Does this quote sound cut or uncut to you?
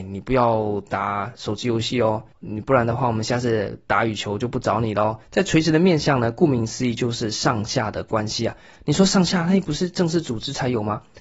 cut